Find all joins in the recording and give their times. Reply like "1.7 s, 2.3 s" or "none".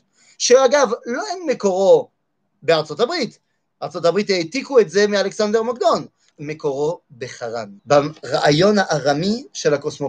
6.3 s, 7.8 s